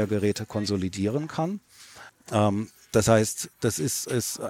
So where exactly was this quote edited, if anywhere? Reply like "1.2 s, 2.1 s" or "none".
2.1 s